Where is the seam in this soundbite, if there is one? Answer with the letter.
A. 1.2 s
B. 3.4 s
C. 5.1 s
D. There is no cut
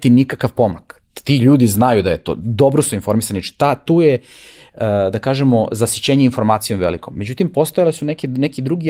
D